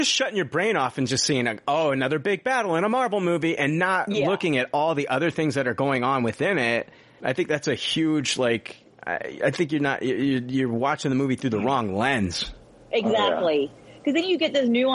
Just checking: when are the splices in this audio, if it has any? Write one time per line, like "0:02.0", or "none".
0:07.2